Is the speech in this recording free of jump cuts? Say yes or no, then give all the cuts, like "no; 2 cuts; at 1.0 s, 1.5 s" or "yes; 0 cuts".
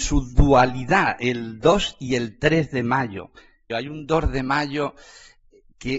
no; 1 cut; at 3.7 s